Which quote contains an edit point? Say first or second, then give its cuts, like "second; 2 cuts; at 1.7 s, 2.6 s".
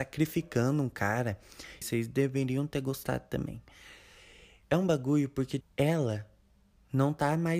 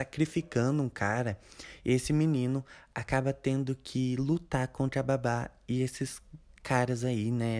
first; 2 cuts; at 1.8 s, 5.6 s